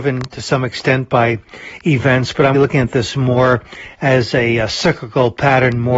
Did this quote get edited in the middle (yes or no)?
yes